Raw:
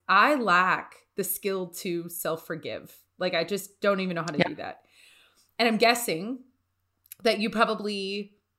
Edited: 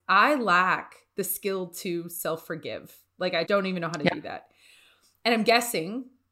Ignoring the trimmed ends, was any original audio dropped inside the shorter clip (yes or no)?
yes